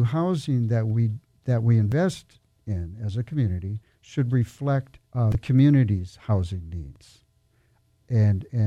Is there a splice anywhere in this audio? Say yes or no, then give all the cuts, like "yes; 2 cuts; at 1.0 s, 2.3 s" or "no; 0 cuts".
yes; 1 cut; at 5.0 s